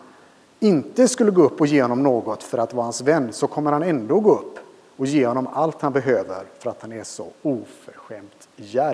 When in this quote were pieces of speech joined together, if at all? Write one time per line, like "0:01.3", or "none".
none